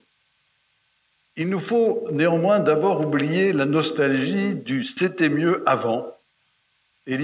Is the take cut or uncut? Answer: cut